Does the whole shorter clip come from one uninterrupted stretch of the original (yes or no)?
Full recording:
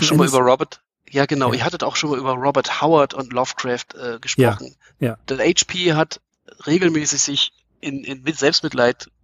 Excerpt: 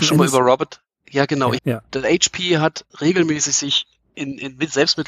no